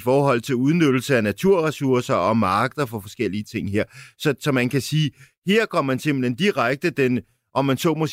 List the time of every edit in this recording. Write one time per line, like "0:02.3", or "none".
none